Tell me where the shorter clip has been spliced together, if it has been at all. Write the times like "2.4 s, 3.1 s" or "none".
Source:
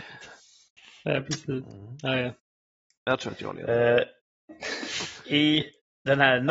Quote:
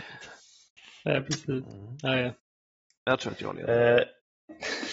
none